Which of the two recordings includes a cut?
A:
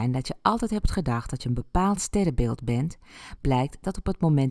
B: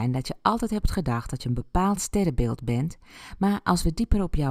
A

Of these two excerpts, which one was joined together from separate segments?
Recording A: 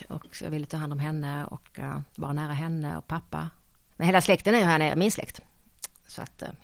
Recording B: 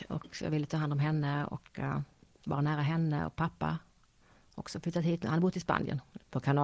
A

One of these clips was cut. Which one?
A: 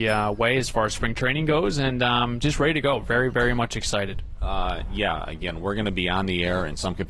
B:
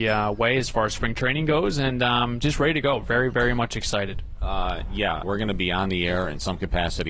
B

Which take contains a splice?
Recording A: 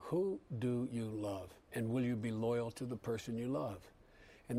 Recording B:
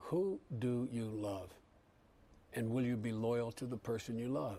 A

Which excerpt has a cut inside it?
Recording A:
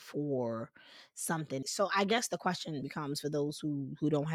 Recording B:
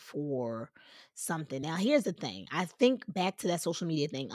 A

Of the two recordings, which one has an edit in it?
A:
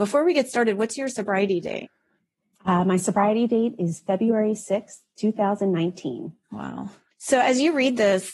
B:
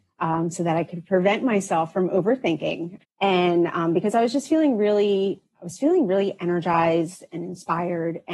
B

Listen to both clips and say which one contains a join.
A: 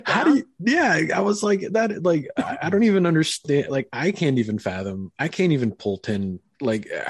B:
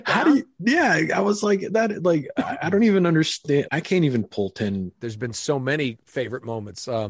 B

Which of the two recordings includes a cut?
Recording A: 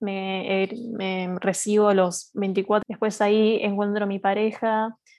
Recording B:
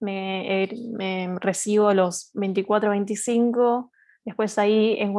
A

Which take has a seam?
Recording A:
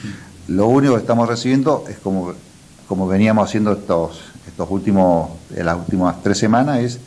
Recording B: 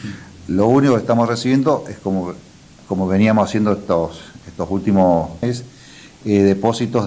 B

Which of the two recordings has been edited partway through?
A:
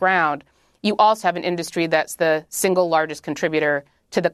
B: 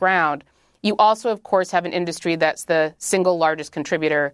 A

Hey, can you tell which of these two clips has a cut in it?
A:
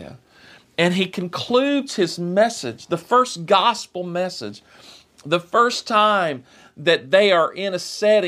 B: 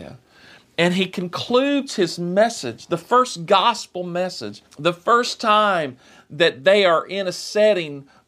B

